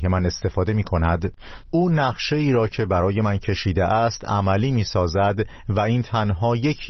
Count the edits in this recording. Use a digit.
1